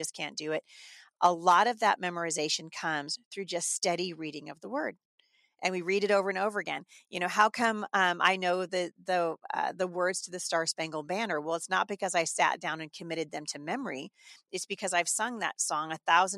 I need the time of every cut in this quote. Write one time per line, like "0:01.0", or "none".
none